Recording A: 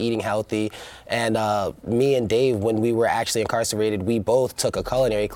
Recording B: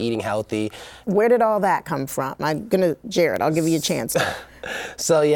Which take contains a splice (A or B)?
B